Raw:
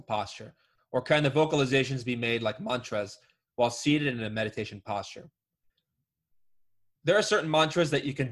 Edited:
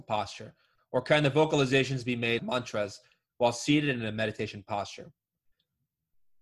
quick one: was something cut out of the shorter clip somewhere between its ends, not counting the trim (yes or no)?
yes